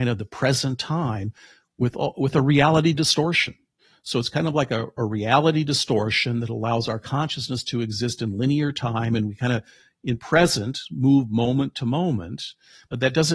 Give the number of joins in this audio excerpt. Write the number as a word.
zero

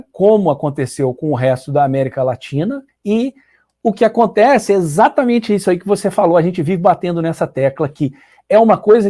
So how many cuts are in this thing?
one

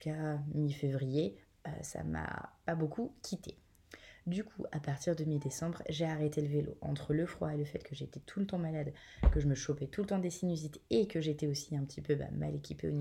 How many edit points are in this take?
zero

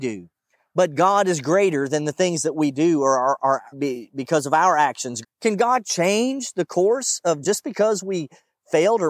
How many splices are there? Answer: two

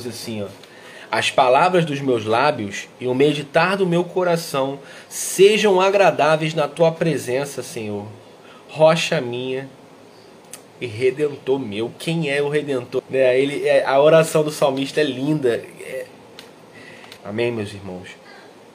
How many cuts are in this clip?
two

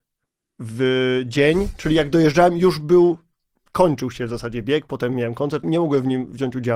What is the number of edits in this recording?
one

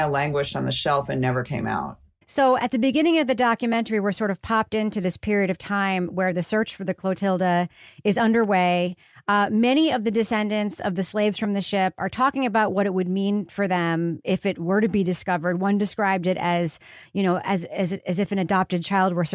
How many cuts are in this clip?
one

